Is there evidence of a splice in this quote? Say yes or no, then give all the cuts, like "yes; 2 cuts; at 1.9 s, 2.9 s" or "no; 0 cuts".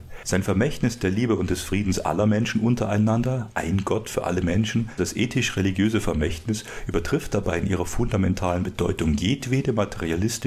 yes; 1 cut; at 5.0 s